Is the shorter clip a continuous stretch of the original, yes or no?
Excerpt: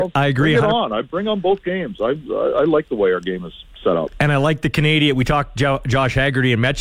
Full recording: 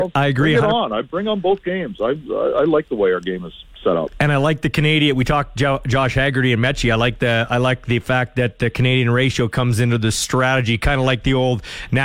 yes